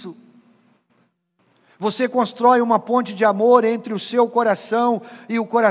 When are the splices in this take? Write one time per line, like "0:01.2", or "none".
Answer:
none